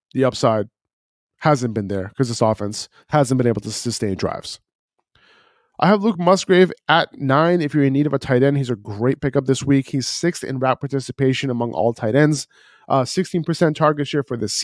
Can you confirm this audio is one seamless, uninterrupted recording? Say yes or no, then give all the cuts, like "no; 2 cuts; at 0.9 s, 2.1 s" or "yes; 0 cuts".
yes; 0 cuts